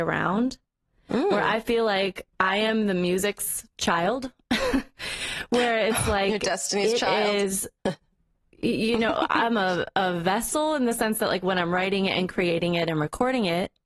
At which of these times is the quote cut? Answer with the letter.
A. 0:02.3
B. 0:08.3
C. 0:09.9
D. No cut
A